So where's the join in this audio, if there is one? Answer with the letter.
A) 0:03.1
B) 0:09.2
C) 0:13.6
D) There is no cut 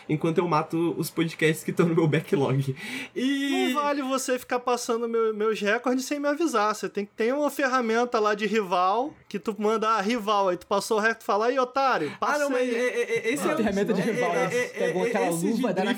B